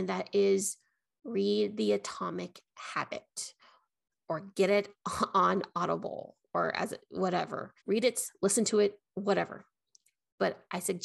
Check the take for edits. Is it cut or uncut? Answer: cut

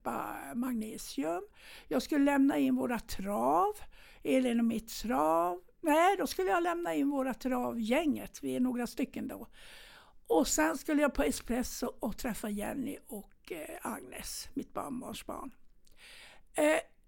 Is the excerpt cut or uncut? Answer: uncut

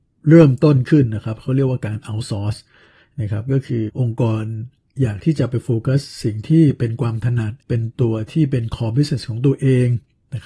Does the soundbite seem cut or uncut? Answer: cut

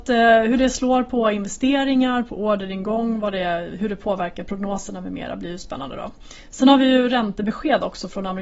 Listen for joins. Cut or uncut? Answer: uncut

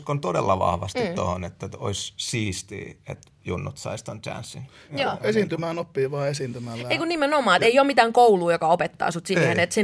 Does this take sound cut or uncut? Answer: uncut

